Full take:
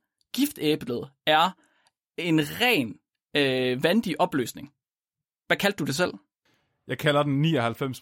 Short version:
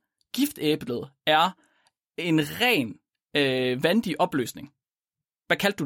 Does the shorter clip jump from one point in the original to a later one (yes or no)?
no